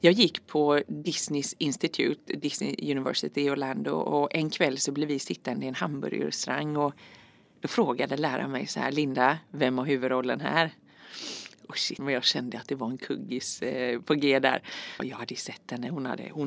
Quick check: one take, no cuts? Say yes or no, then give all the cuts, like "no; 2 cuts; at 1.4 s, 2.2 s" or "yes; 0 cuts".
no; 2 cuts; at 12.0 s, 15.0 s